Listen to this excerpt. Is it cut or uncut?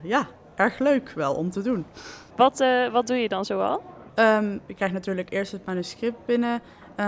cut